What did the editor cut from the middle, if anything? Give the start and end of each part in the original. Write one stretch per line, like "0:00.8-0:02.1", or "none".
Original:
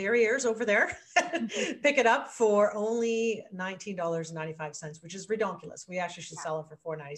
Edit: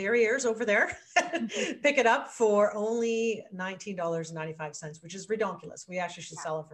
none